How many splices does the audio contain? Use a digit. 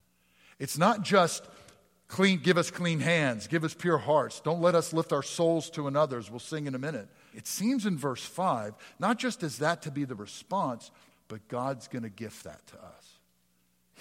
1